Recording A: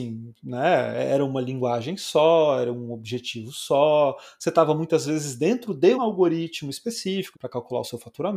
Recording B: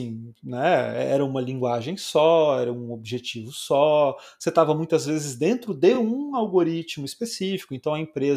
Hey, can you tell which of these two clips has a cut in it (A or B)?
A